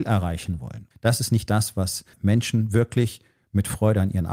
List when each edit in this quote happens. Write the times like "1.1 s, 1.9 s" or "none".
0.9 s, 2.1 s

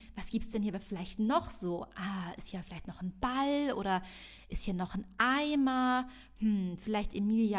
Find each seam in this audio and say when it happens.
none

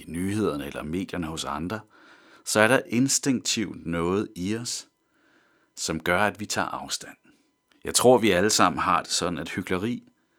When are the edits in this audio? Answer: 7.6 s

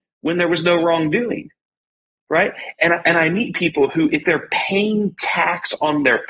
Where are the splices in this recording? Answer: 4.2 s

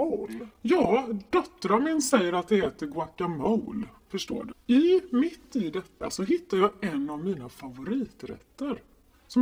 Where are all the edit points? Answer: 4.5 s

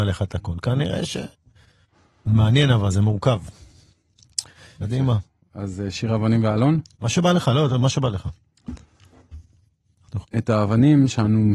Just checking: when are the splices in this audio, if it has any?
4.8 s, 10.2 s

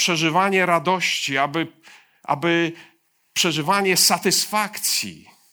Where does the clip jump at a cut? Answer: none

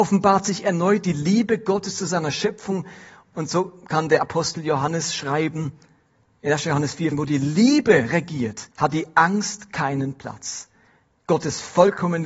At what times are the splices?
7.1 s, 8.7 s

